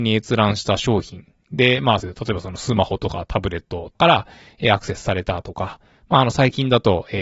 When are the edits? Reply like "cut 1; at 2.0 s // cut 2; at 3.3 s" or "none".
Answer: cut 1; at 2.0 s // cut 2; at 3.9 s